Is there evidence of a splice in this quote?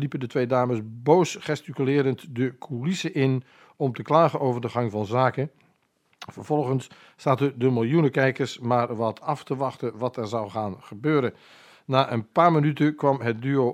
no; 0 cuts

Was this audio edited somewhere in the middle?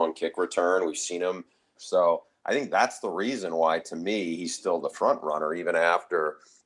yes; 1 cut; at 1.8 s

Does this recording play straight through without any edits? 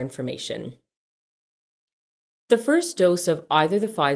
yes; 0 cuts

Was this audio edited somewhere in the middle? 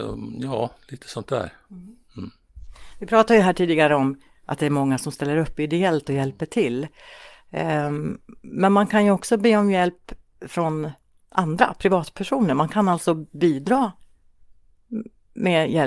no; 0 cuts

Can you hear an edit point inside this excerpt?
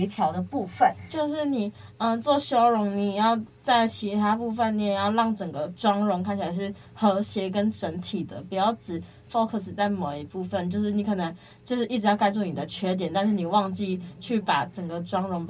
no; 0 cuts

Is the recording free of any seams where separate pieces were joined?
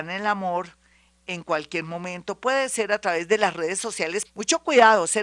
no; 1 cut; at 4.2 s

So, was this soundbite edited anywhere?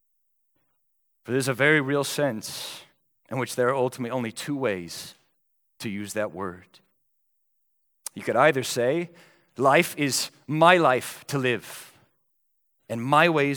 no; 0 cuts

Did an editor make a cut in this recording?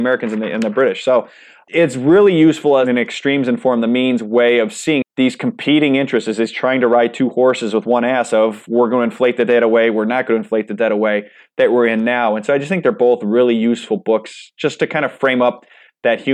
yes; 1 cut; at 5.0 s

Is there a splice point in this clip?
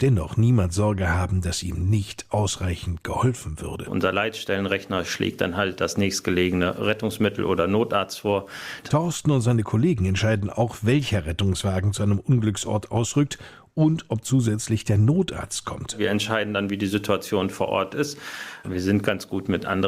yes; 3 cuts; at 3.8 s, 8.8 s, 18.6 s

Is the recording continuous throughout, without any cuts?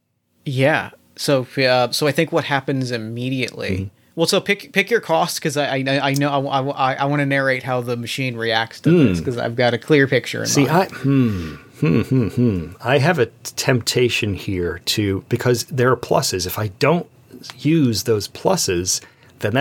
yes; 0 cuts

